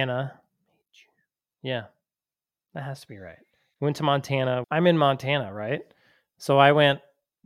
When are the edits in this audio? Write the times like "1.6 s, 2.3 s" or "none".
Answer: 4.6 s